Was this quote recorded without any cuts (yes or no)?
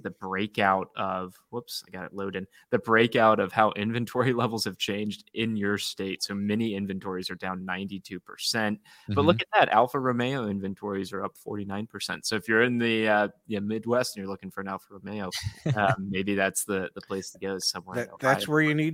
yes